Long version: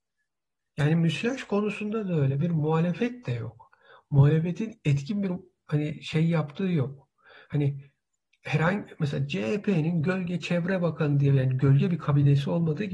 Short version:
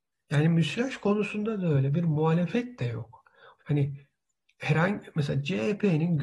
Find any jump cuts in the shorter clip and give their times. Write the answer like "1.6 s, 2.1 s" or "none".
3.6 s